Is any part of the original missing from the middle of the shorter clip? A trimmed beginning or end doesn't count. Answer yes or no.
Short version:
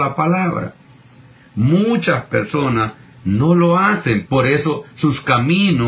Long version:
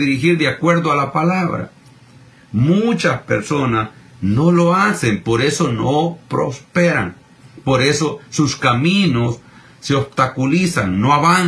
yes